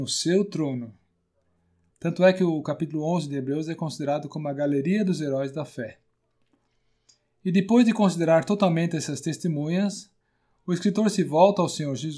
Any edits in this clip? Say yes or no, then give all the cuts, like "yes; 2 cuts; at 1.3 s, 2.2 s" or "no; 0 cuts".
yes; 1 cut; at 1.9 s